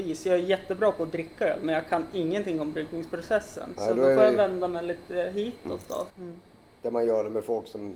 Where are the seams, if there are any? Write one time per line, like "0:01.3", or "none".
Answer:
0:06.1